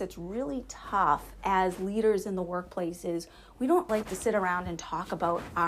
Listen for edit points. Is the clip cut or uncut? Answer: cut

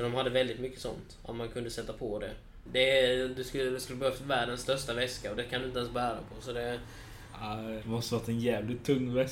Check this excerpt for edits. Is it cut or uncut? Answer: cut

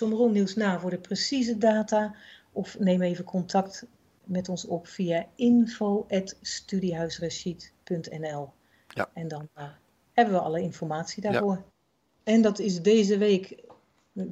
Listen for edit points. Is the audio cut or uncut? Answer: cut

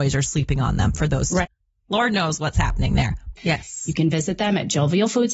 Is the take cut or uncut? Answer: cut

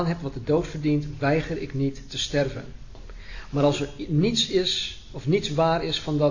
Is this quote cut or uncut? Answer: uncut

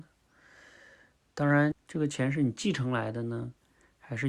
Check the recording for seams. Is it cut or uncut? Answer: cut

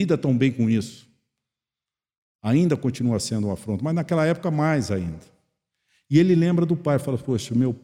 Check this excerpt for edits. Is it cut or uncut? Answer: uncut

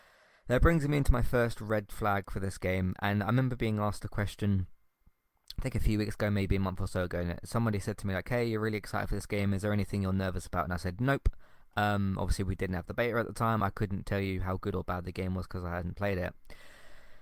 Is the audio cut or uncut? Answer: uncut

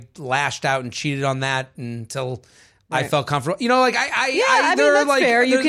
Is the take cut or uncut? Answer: uncut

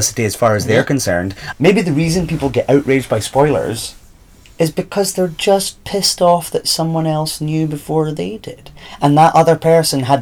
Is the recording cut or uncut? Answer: cut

